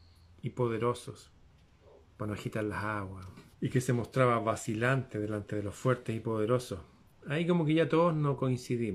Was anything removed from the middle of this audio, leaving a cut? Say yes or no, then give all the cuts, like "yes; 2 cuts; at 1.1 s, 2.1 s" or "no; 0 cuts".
yes; 2 cuts; at 2.1 s, 3.5 s